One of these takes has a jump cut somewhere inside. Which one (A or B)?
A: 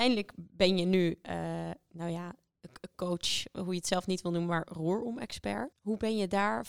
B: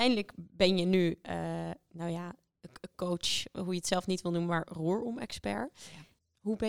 A